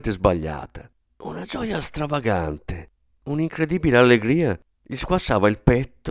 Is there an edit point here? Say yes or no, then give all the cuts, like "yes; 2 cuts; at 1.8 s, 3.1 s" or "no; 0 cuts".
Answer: yes; 1 cut; at 1.1 s